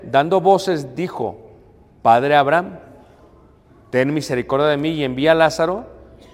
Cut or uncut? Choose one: uncut